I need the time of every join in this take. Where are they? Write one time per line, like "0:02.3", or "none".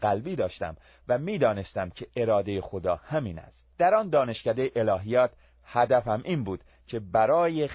0:03.7